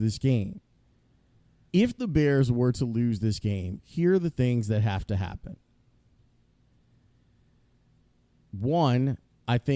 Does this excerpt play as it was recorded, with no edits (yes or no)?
no